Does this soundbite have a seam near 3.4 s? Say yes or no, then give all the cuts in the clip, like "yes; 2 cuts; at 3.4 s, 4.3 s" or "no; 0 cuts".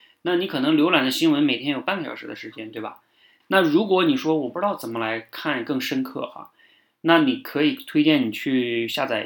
yes; 1 cut; at 3.4 s